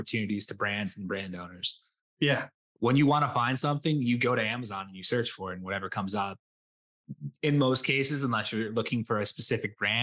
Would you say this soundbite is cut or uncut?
cut